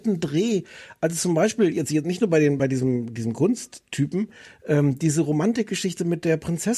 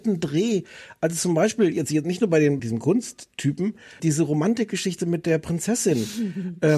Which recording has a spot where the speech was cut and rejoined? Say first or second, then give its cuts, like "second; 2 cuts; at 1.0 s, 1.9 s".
second; 2 cuts; at 2.6 s, 4.0 s